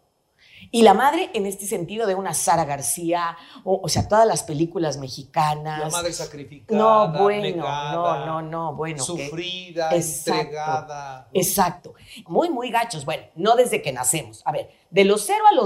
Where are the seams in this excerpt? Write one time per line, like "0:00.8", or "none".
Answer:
0:12.3